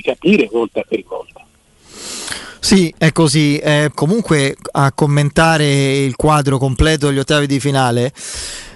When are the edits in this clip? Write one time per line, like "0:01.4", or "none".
0:03.9